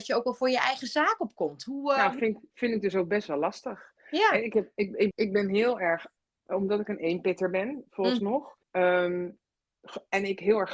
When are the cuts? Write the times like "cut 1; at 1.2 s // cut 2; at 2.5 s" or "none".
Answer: cut 1; at 5.1 s // cut 2; at 8.6 s